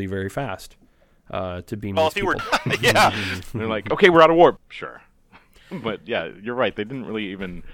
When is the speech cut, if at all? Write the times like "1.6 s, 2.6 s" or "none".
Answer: 2.4 s, 4.6 s